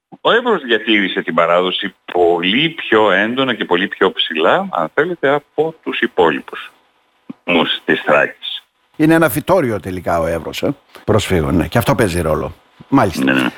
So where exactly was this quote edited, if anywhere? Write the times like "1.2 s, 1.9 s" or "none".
8.9 s, 11.0 s